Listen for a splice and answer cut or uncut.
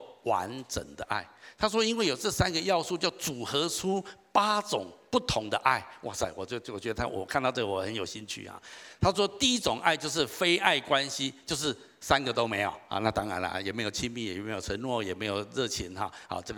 uncut